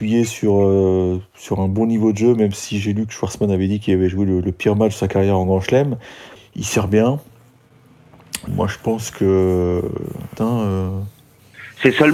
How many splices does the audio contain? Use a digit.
3